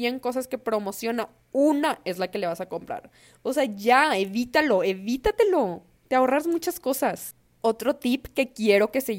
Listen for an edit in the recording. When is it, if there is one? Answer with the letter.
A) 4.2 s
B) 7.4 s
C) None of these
C